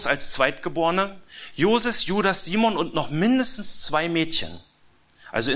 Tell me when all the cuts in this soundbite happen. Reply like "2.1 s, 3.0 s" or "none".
none